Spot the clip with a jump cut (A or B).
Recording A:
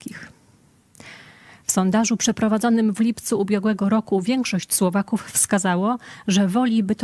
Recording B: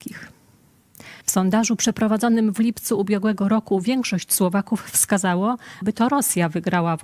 B